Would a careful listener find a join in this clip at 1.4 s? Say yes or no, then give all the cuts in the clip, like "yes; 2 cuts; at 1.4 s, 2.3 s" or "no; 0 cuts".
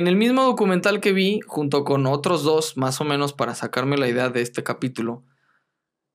no; 0 cuts